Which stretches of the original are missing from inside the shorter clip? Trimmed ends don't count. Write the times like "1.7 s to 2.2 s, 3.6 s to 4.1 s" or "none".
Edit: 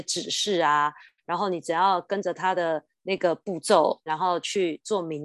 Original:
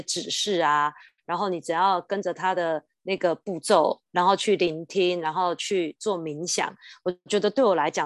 4.1 s to 5.2 s

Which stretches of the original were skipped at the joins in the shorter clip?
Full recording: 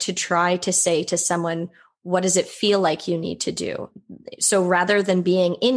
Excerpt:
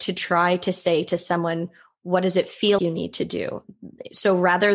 2.8 s to 3.1 s

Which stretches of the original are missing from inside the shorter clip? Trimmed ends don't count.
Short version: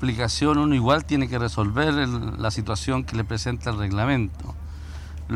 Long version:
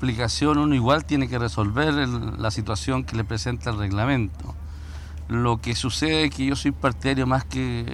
none

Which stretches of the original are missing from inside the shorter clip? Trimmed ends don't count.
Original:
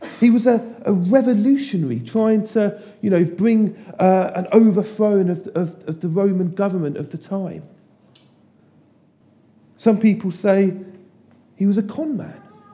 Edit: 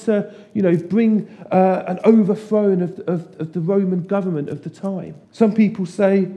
7.7 s to 9.7 s

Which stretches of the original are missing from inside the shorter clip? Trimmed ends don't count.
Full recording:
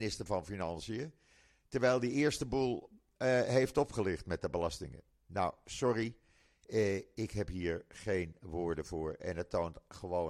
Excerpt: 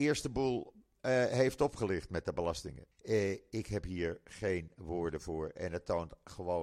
5.1 s to 6.6 s

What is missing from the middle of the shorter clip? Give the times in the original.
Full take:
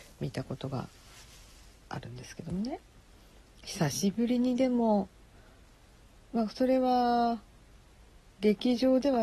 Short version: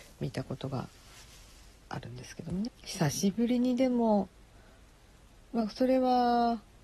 2.7 s to 3.5 s

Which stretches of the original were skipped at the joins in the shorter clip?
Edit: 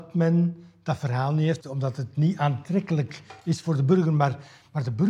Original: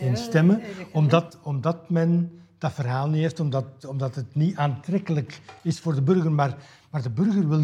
3.3 s to 3.8 s

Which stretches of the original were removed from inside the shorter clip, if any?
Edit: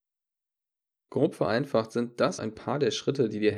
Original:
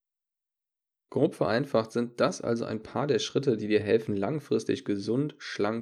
2.4 s to 2.7 s

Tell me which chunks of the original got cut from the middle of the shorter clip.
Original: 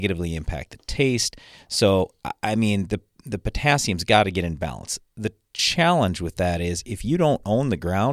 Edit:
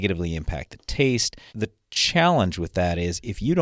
1.5 s to 5.1 s

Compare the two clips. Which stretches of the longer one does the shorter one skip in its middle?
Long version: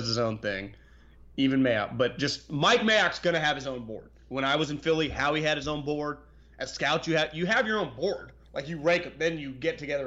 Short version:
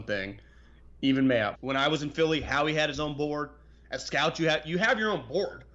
1.9 s to 4.2 s

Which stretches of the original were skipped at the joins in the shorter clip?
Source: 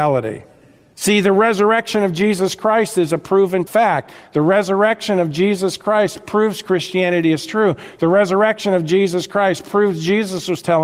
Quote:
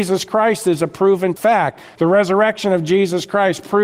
4.3 s to 8.0 s

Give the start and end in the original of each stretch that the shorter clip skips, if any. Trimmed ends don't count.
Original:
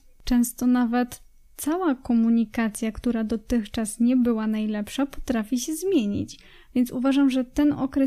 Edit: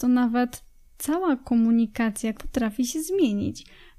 2.9 s to 5.1 s

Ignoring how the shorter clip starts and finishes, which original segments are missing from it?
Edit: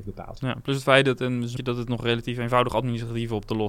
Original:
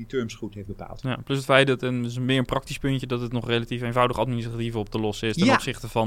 2.2 s to 3.0 s

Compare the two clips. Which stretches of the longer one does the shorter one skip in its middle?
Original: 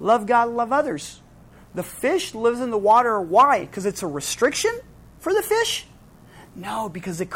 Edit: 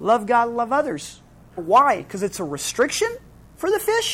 1.6 s to 3.2 s

